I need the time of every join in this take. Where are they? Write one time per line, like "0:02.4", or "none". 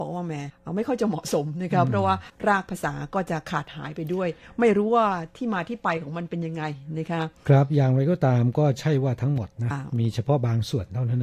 0:09.7